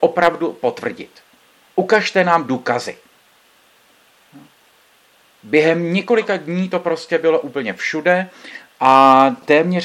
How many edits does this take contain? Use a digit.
1